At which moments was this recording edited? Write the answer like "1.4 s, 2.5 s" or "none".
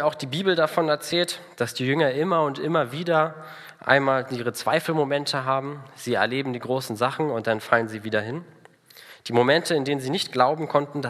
none